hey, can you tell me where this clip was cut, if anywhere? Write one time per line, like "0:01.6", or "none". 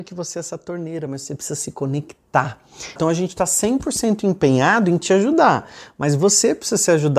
0:03.0